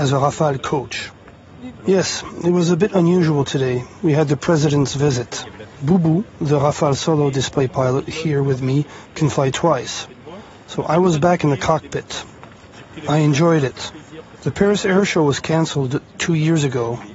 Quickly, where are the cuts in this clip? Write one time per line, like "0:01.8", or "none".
0:01.8